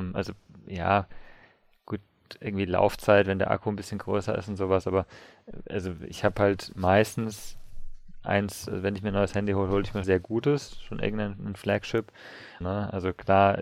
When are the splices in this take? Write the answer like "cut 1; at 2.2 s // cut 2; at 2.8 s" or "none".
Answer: cut 1; at 10.0 s // cut 2; at 12.6 s